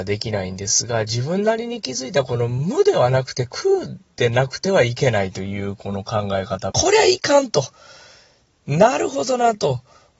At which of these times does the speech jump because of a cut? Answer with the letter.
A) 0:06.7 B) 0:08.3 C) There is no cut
A